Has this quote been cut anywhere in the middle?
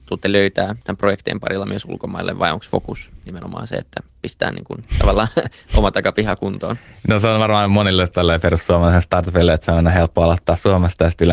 no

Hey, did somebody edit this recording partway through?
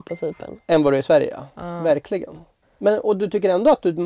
yes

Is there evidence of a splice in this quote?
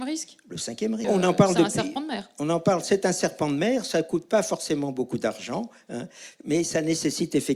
yes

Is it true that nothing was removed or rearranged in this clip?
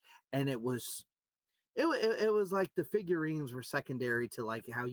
yes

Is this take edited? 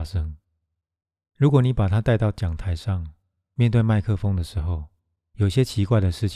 no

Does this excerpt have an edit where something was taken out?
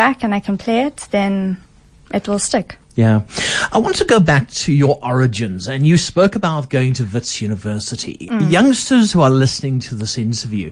no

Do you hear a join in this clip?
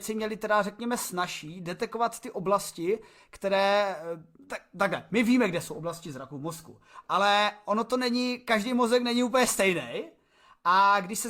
no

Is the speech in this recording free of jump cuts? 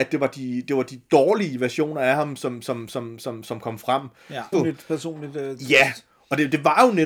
no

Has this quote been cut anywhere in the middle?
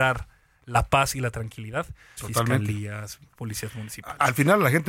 yes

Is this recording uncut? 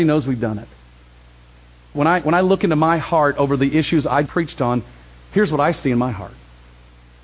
no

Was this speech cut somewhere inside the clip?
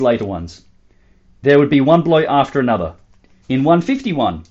yes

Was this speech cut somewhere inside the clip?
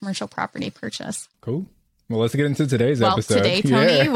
yes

